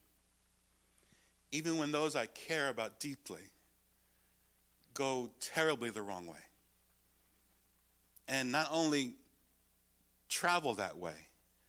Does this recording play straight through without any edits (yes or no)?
yes